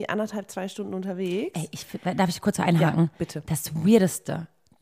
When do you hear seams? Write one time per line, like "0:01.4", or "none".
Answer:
none